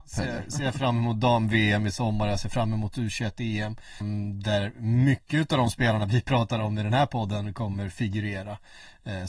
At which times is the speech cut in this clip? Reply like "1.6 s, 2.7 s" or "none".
4.0 s

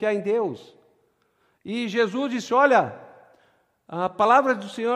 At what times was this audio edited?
none

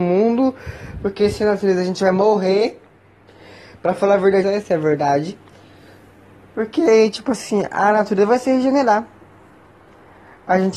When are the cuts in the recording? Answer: 4.4 s

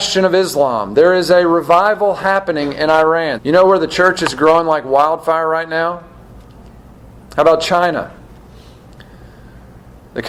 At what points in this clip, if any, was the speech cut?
3.4 s

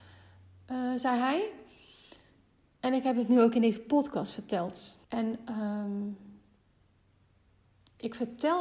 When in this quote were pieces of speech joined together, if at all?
2.7 s, 5.0 s

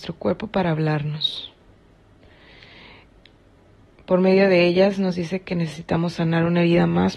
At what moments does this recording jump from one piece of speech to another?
none

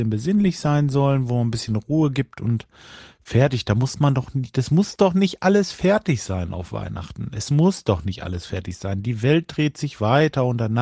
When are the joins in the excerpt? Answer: none

